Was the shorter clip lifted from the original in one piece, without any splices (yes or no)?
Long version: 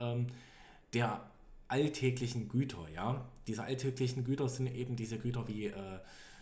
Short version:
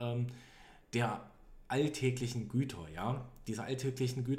yes